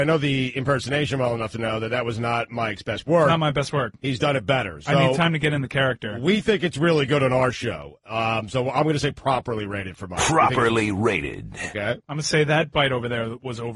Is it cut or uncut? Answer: uncut